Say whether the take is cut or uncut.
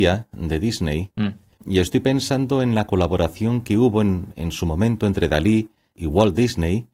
uncut